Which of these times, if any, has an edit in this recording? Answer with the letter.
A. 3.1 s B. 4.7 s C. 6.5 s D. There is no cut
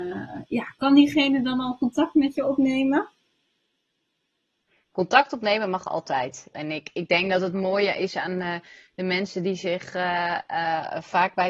C